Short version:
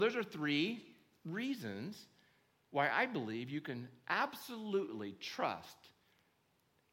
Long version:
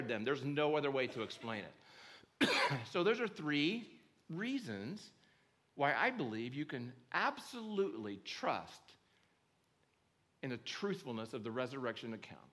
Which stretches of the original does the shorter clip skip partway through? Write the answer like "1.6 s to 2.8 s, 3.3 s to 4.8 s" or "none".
none